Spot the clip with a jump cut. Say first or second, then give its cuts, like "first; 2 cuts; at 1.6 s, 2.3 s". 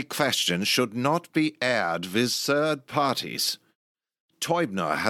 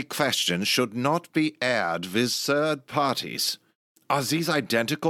second; 1 cut; at 4.0 s